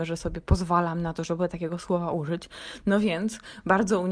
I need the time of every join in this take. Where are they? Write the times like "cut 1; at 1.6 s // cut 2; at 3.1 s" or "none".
none